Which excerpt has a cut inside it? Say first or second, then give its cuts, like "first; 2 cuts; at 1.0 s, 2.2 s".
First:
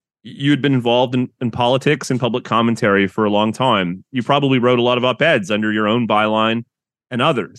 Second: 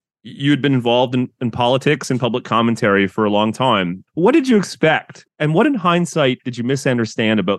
second; 2 cuts; at 4.0 s, 5.3 s